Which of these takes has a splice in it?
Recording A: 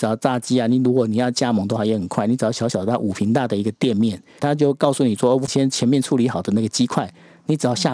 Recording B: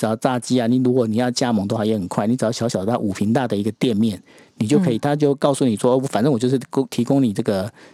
A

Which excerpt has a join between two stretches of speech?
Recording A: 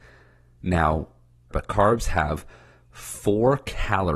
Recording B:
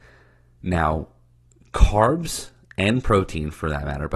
A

